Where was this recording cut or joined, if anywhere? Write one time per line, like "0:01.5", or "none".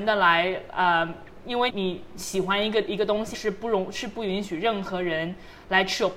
0:01.7
0:03.3